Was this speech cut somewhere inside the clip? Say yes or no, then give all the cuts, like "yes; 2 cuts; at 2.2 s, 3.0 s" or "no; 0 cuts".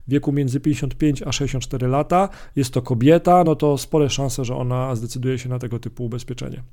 no; 0 cuts